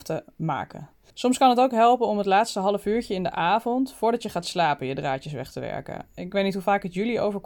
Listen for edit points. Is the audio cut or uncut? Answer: cut